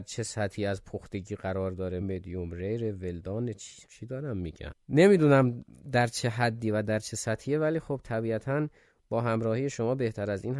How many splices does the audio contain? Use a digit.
2